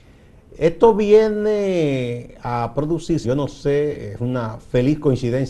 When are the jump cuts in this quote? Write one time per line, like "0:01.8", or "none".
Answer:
0:03.2